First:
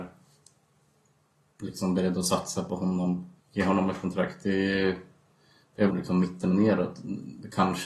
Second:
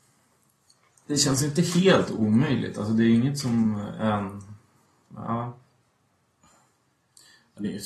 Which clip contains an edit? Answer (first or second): first